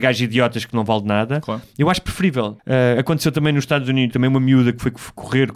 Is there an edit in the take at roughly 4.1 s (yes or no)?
yes